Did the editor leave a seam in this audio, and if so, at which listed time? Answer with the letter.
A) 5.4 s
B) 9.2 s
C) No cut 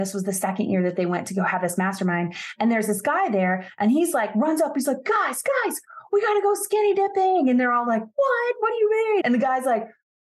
B